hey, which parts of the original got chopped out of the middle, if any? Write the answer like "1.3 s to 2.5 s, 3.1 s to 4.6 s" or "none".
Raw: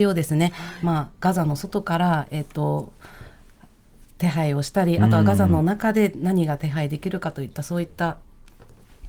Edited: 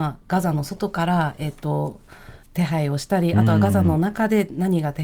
3.4 s to 4.1 s